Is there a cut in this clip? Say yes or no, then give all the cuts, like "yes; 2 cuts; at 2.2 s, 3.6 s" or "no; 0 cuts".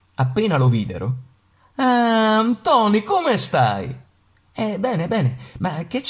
no; 0 cuts